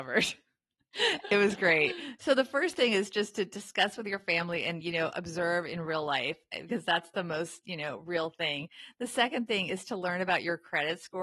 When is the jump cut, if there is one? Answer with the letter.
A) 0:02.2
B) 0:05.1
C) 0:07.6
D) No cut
D